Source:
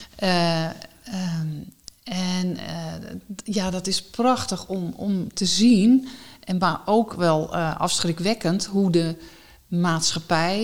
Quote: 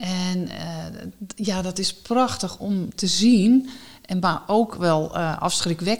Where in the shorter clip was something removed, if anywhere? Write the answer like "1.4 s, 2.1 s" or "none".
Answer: 2.6 s